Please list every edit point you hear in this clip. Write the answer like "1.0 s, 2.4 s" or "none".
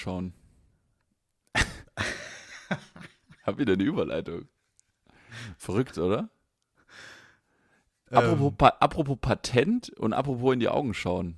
none